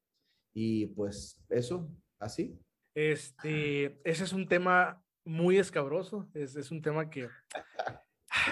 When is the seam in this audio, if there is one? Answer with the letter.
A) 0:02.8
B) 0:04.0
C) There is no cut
A